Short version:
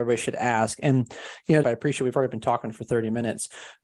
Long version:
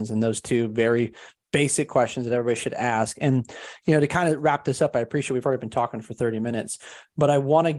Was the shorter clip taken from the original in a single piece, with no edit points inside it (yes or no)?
no